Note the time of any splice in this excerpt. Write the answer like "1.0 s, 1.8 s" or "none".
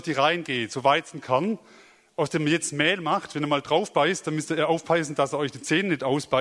none